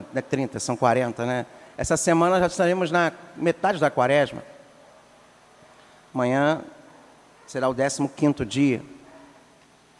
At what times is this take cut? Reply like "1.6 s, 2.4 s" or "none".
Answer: none